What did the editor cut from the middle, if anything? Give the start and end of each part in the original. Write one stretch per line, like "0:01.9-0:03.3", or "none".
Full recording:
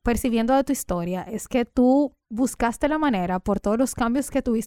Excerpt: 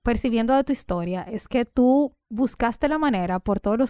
none